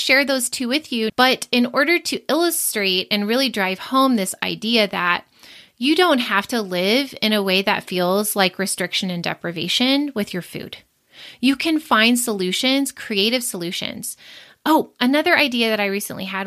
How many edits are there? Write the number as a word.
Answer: one